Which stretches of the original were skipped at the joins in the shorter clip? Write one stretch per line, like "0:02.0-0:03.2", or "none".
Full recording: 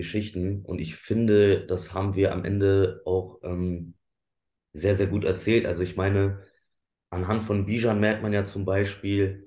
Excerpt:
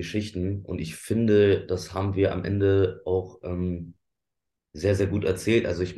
none